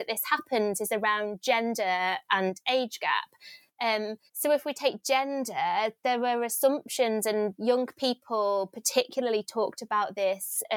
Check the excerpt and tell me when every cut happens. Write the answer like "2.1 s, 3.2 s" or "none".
4.3 s